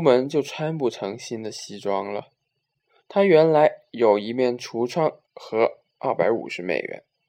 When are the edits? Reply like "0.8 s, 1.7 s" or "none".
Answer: 3.0 s, 5.2 s